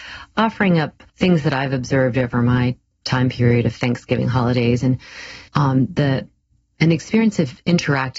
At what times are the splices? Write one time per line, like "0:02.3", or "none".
0:01.1
0:05.5